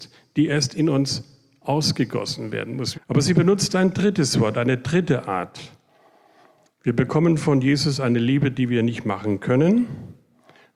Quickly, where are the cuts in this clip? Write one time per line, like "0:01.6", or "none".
0:02.9